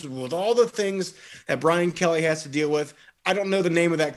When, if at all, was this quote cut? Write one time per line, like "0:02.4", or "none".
none